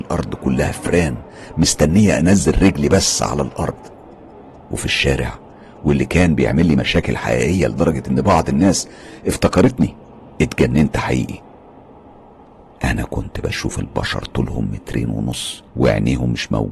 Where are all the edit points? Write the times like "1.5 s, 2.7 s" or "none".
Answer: 15.7 s